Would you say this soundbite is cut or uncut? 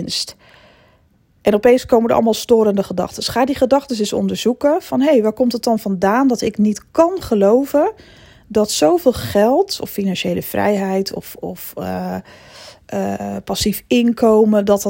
uncut